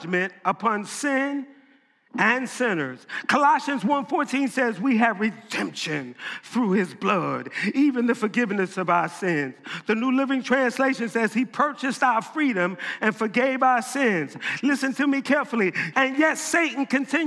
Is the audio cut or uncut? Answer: cut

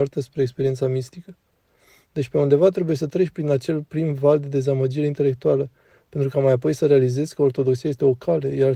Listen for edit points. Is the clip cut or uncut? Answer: uncut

